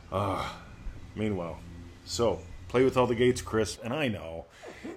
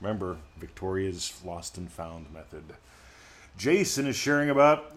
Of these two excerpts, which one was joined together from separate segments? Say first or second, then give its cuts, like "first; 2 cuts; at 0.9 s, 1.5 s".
first; 1 cut; at 3.8 s